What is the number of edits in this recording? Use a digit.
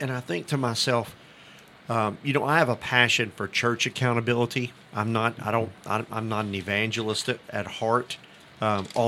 0